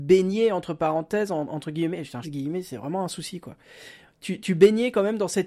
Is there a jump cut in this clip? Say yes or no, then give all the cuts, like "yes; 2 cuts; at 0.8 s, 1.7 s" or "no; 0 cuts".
yes; 1 cut; at 2.2 s